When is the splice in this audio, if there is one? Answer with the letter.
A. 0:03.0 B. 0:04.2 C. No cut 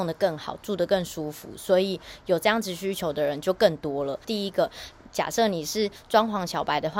B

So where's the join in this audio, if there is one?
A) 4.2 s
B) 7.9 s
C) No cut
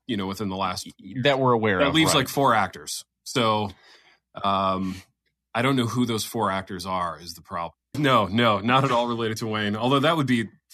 B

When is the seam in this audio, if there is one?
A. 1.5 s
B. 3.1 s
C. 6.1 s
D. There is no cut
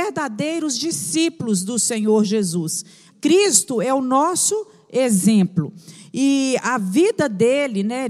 B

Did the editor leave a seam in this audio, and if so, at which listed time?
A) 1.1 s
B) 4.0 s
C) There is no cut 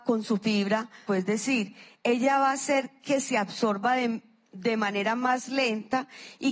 A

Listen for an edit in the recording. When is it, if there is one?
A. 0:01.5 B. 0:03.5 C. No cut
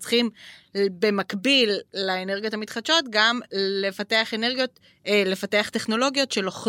C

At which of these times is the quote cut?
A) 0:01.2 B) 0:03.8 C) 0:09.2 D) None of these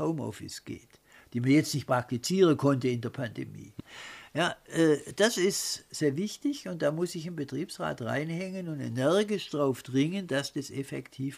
B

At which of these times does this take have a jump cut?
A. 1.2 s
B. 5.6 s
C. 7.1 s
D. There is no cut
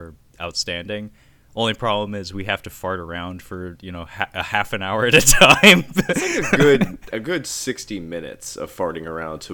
C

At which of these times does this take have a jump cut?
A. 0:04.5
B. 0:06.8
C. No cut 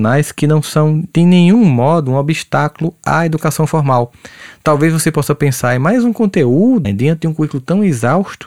B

